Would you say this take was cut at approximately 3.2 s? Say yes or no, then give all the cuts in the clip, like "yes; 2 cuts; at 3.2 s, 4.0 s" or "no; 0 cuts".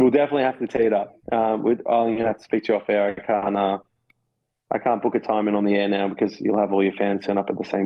no; 1 cut; at 1.2 s